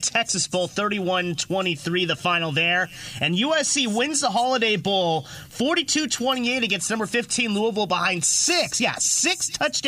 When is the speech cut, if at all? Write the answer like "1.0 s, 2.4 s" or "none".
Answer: none